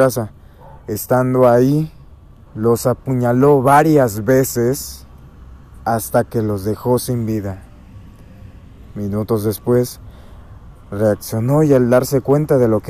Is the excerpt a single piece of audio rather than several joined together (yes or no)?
no